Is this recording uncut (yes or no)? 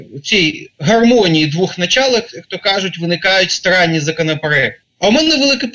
no